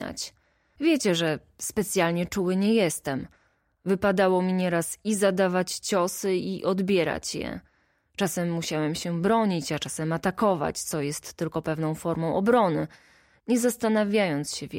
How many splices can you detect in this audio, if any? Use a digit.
0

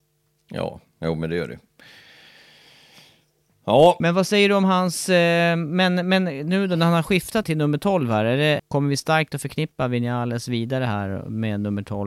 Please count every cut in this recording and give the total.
2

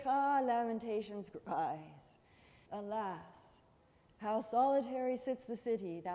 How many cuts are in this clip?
1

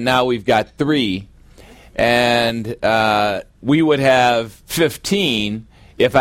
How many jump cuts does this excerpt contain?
0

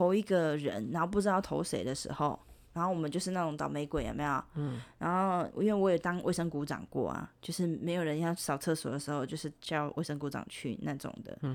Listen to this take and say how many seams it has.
1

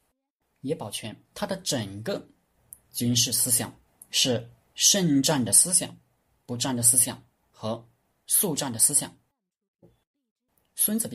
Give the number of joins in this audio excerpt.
2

